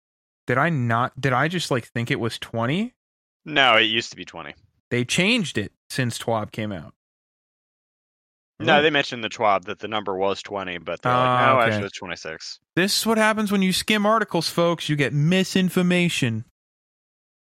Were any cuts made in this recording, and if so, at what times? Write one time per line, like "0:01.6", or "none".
none